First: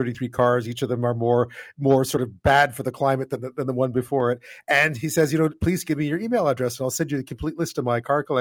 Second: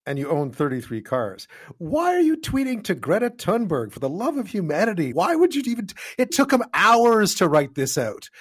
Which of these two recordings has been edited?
second; 2 cuts; at 5.1 s, 6.3 s

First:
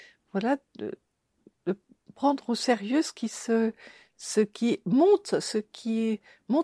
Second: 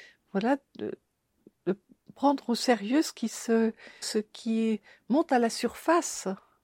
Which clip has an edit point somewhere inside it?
second; 1 cut; at 4.0 s

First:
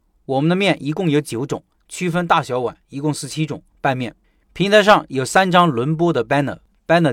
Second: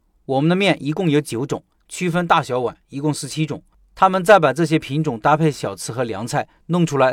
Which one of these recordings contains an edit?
first; 1 cut; at 3.7 s

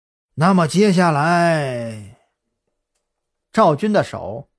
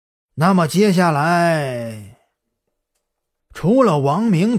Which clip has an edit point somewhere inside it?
second; 1 cut; at 3.4 s

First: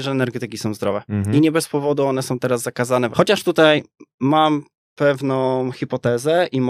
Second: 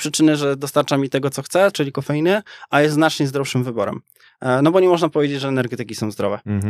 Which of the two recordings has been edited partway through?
first; 1 cut; at 3.1 s

